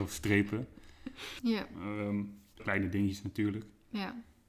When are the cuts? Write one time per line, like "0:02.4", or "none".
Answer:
0:01.4
0:02.6